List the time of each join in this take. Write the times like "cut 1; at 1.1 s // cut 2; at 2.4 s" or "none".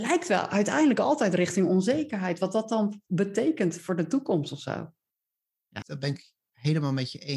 cut 1; at 5.8 s